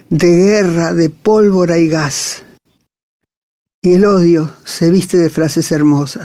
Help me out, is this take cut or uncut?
uncut